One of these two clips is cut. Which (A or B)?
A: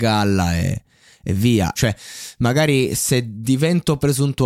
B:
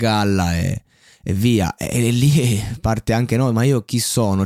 A